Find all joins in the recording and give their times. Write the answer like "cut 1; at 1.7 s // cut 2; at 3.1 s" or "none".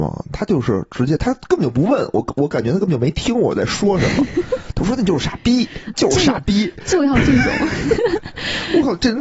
cut 1; at 5.9 s